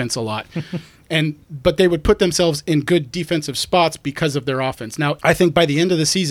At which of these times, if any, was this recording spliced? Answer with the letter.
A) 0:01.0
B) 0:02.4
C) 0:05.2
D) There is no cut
C